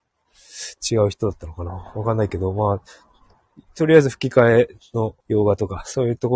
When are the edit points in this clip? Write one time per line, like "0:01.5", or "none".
0:05.2